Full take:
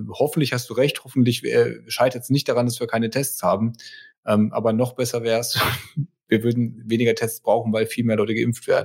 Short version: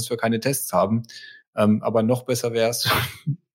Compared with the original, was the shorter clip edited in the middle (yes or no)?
no